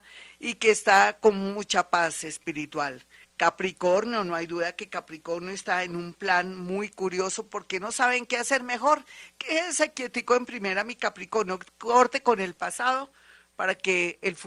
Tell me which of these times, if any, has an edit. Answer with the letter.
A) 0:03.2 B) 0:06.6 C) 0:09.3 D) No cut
A